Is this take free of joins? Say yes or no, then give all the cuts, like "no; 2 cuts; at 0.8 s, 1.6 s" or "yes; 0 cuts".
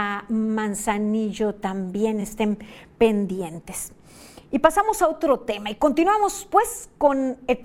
yes; 0 cuts